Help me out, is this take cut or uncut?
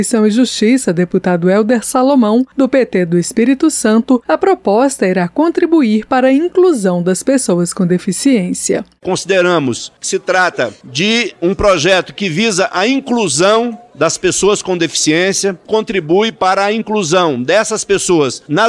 uncut